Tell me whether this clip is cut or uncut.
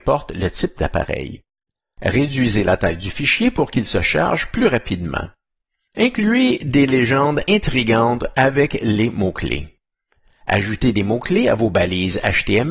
uncut